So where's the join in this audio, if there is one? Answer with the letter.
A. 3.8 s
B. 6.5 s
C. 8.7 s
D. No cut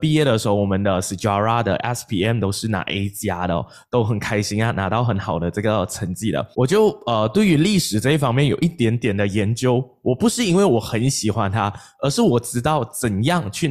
B